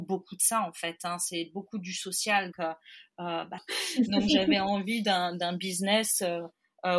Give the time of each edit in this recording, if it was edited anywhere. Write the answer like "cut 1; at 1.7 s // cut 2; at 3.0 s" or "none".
cut 1; at 2.5 s // cut 2; at 3.6 s